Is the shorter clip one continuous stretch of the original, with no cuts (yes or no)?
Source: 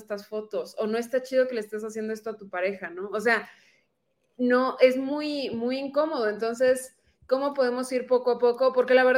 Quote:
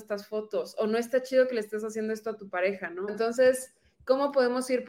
no